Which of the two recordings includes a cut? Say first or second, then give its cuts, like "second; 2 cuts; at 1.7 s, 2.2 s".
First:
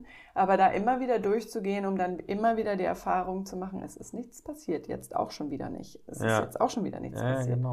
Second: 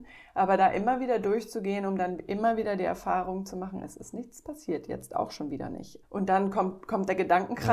second; 1 cut; at 6.0 s